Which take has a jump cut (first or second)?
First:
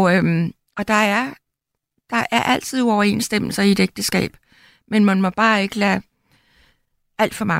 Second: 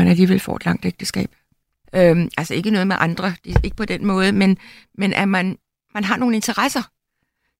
second